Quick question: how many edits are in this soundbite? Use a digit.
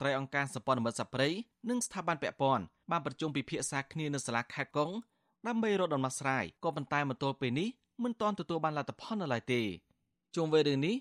2